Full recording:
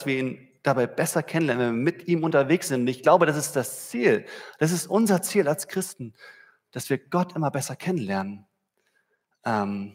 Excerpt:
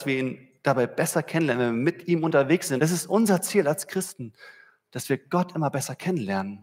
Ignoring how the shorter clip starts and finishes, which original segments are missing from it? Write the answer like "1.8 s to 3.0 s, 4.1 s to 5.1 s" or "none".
2.8 s to 4.6 s